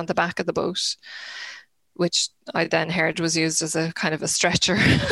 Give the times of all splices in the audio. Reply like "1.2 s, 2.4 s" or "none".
none